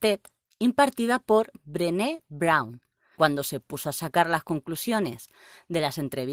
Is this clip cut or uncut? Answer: cut